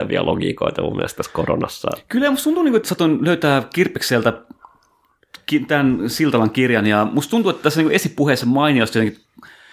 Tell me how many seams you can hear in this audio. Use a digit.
1